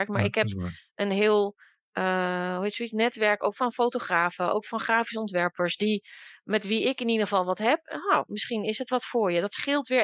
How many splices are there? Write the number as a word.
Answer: zero